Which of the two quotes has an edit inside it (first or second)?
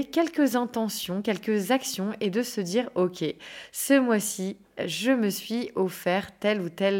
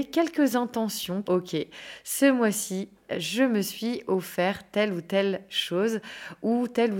second